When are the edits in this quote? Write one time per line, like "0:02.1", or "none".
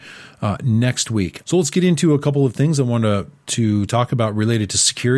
0:01.4

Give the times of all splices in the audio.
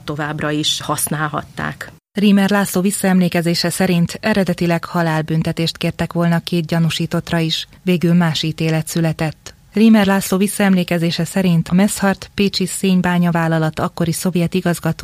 0:02.0

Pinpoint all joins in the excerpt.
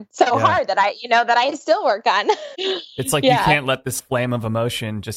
0:02.5
0:04.0

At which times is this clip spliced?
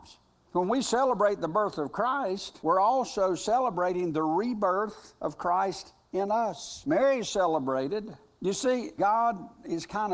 0:09.0

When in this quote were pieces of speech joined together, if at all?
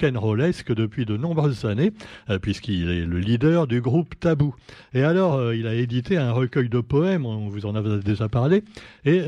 none

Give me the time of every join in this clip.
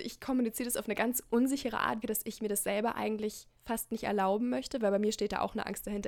0:02.0
0:03.6

